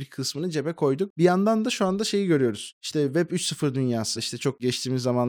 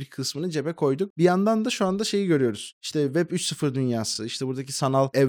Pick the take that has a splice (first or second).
first